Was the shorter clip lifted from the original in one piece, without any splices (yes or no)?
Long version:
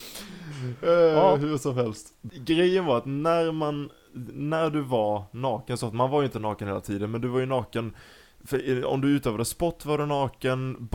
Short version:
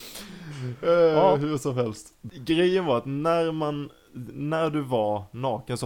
yes